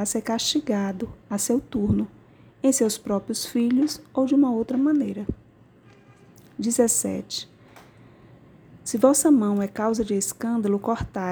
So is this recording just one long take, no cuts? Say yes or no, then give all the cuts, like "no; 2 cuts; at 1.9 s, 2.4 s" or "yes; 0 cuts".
yes; 0 cuts